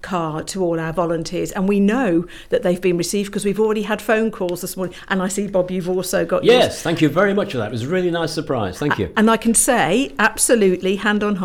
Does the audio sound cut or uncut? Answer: uncut